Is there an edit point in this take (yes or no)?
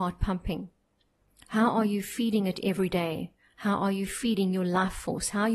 no